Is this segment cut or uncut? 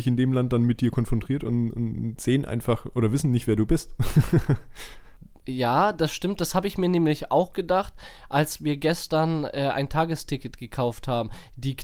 uncut